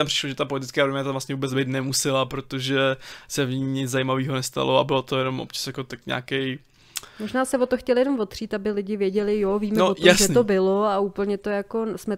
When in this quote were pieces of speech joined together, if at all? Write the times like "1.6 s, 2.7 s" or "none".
none